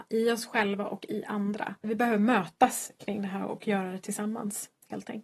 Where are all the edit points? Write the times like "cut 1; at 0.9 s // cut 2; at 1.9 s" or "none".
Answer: cut 1; at 1.8 s